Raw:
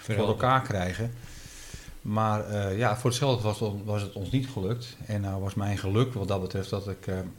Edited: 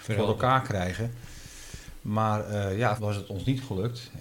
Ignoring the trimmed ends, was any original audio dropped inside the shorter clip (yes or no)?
yes